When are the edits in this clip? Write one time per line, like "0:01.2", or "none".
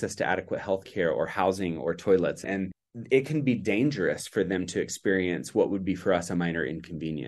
none